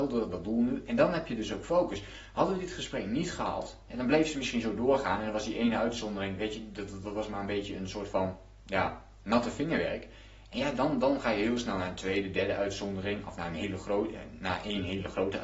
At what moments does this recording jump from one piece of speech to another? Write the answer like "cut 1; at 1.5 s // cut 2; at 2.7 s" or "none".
cut 1; at 9.2 s